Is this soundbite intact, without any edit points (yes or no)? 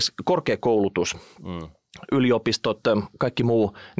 yes